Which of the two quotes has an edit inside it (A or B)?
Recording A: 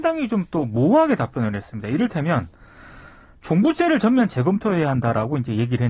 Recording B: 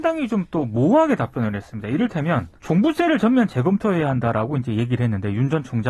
B